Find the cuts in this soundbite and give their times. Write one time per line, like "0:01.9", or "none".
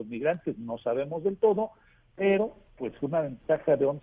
none